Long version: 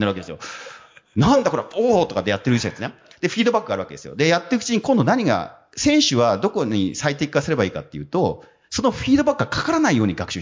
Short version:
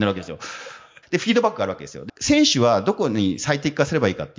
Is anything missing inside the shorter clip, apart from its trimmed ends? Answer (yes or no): yes